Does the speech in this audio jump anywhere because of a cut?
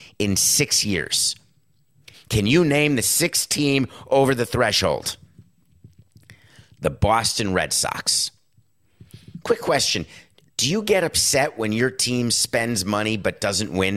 yes; 1 cut; at 2.1 s

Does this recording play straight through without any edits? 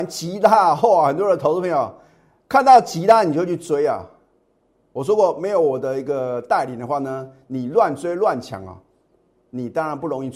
yes; 0 cuts

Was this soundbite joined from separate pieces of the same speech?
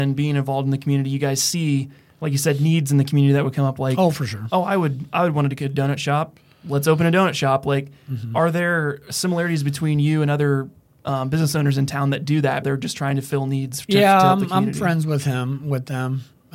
yes; 1 cut; at 12.6 s

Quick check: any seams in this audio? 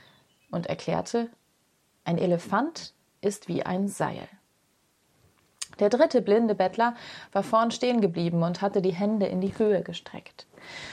no; 0 cuts

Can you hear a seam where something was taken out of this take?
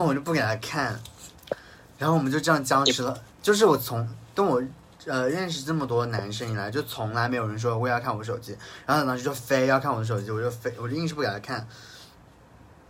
no; 0 cuts

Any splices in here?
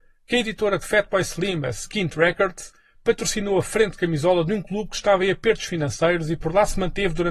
no; 0 cuts

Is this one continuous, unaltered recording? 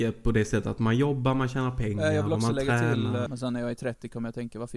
no; 1 cut; at 3.3 s

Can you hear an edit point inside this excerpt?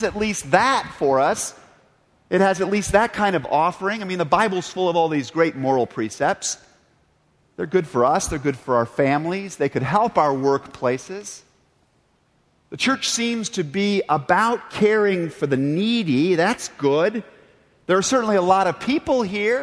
no; 0 cuts

